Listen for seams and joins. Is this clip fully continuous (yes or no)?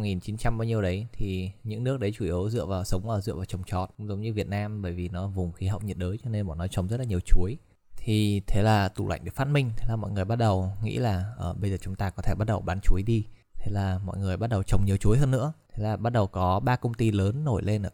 yes